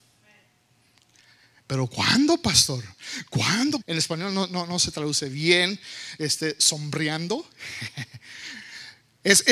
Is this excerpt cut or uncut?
cut